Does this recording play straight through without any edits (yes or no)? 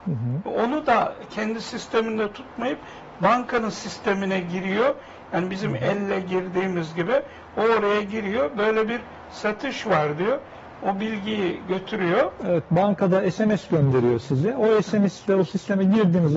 yes